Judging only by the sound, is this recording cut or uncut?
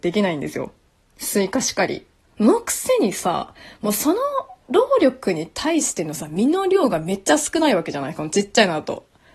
cut